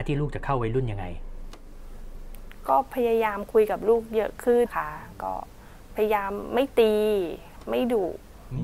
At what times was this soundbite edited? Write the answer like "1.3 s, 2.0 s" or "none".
4.7 s